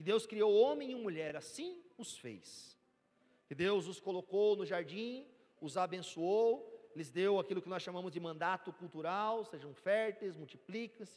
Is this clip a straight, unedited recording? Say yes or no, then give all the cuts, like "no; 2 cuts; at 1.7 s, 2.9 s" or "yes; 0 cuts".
yes; 0 cuts